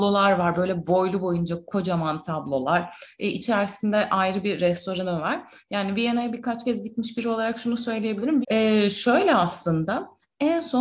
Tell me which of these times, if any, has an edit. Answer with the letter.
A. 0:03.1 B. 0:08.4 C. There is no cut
B